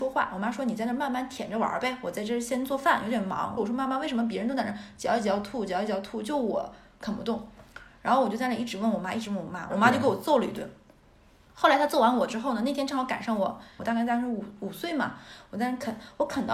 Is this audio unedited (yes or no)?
no